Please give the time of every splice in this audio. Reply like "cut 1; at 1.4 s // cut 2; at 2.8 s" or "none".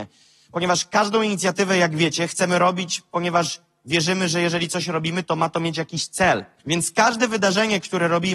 cut 1; at 6.6 s